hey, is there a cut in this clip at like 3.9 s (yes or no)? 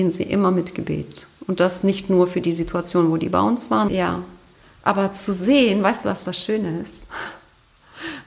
yes